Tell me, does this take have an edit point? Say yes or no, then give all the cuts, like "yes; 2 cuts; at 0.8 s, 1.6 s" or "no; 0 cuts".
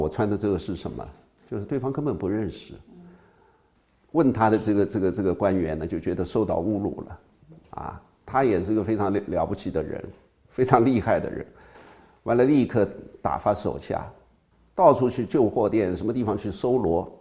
no; 0 cuts